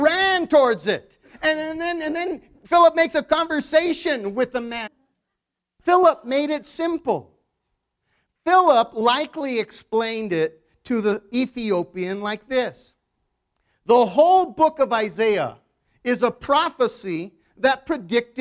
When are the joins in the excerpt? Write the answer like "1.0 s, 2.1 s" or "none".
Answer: 4.9 s

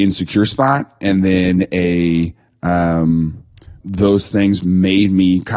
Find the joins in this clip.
3.8 s

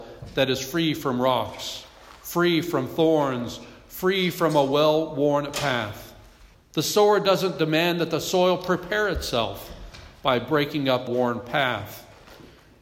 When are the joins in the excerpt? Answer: 6.5 s, 11.1 s

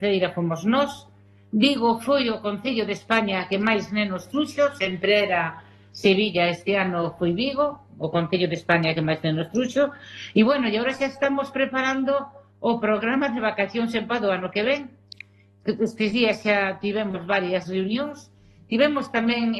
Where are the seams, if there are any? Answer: none

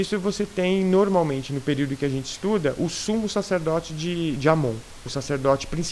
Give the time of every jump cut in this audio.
none

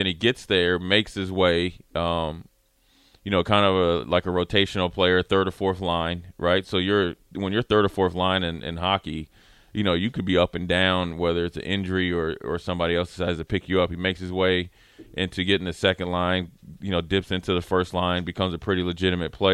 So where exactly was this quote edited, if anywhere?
none

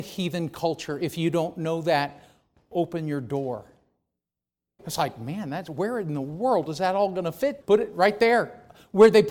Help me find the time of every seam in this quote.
4.8 s, 7.6 s

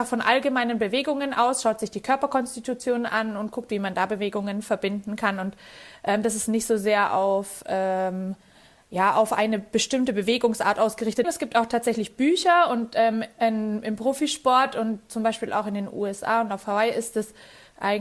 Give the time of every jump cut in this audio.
11.2 s

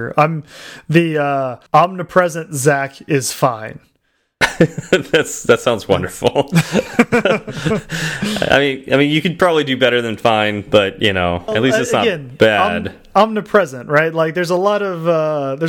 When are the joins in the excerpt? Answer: 1.7 s, 11.5 s

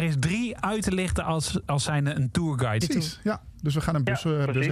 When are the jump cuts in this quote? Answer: 2.8 s

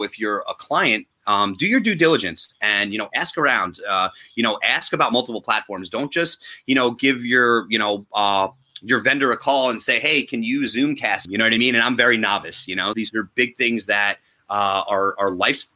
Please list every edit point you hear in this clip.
11.3 s, 12.9 s

